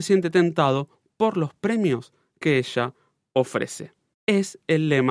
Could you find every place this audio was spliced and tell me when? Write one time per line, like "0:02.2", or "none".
0:04.1